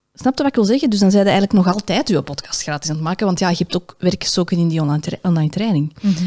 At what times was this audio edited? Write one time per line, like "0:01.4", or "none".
none